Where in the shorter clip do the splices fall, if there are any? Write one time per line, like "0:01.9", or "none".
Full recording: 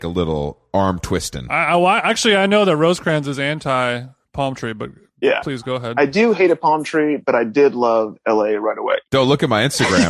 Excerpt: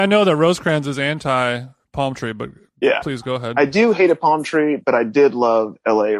none